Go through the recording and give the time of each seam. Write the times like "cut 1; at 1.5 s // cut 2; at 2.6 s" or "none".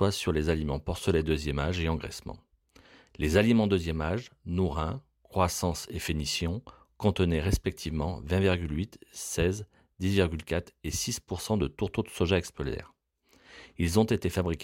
none